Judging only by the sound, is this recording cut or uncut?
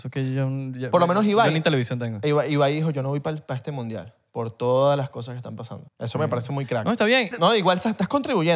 cut